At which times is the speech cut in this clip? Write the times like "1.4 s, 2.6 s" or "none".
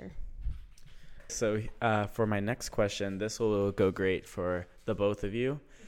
1.3 s